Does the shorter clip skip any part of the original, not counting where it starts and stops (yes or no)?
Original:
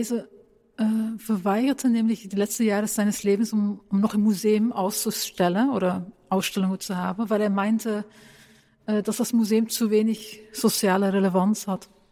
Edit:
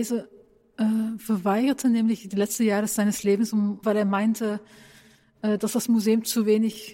yes